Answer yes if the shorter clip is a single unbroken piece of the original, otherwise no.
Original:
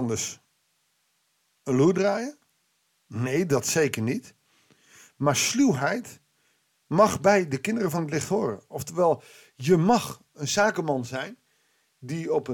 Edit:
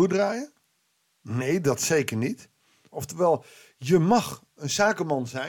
no